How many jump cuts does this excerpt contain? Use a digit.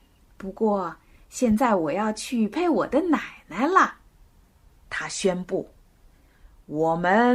2